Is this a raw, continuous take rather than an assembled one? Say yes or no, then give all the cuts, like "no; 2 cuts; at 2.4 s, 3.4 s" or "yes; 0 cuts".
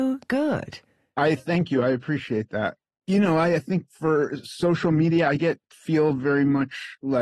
yes; 0 cuts